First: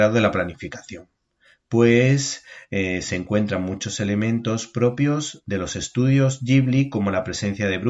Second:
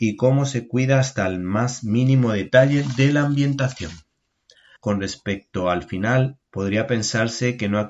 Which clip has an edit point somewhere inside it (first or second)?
second